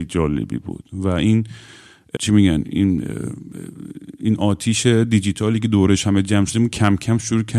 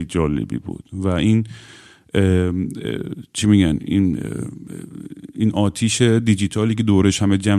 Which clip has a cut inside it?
first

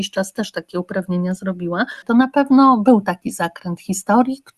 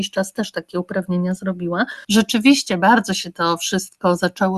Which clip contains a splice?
first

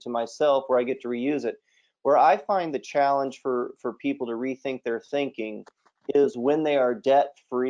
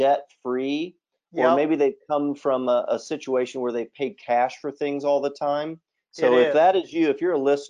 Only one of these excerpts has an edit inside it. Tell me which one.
second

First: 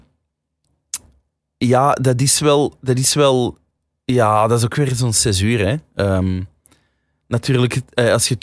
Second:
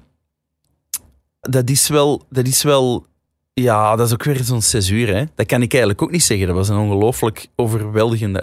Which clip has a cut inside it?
second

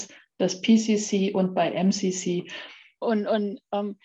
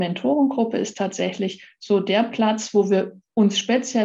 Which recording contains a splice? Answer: first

